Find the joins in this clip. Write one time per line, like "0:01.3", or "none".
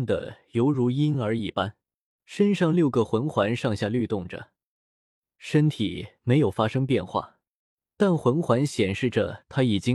0:02.2